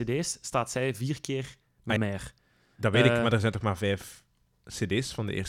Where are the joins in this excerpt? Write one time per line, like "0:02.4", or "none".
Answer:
0:02.0